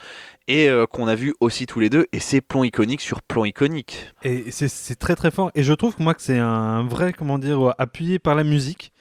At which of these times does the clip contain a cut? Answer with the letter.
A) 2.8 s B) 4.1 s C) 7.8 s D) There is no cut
B